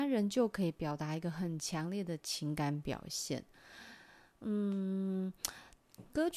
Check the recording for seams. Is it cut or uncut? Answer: uncut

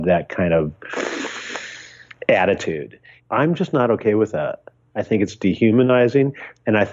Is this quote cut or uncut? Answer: cut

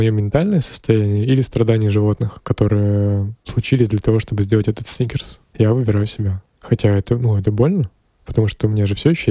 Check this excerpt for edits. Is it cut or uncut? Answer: uncut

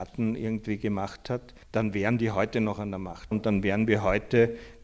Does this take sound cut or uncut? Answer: cut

